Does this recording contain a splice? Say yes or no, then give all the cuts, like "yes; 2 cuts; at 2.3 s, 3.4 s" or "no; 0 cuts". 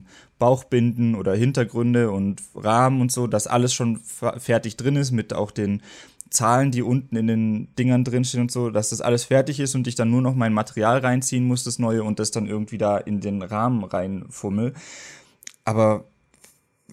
no; 0 cuts